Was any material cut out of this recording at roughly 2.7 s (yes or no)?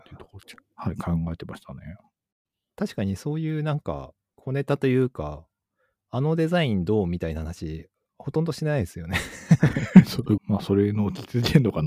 no